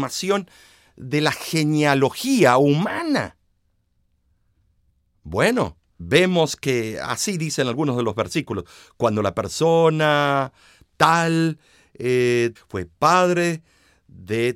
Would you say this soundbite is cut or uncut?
cut